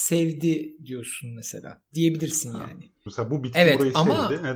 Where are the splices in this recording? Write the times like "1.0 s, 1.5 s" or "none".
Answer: 3.1 s